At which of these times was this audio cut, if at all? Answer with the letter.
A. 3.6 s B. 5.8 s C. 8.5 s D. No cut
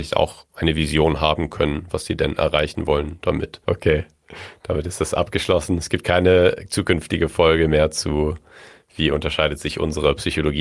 A